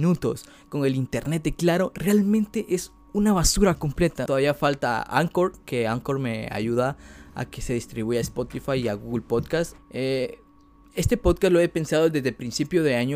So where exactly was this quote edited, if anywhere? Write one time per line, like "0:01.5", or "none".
0:04.3
0:09.8